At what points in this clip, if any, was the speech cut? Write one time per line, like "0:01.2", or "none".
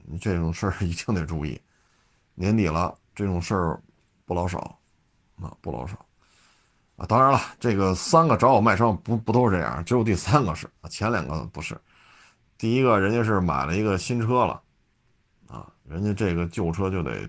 none